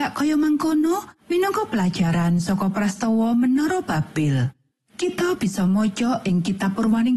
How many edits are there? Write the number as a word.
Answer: zero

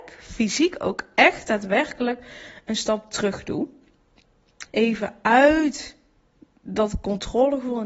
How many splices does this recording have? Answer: one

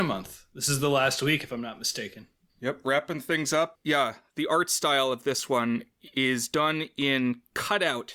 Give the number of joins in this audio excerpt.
one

